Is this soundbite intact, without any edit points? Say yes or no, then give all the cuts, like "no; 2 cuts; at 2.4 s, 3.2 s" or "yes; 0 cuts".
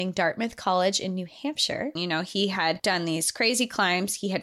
no; 1 cut; at 2.0 s